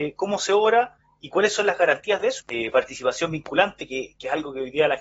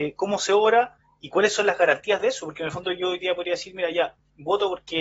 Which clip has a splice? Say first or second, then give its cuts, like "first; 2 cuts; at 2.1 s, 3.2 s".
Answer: first; 1 cut; at 2.4 s